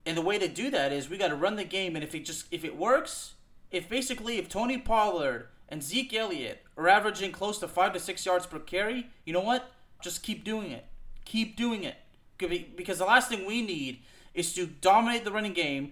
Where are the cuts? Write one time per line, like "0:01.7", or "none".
0:10.0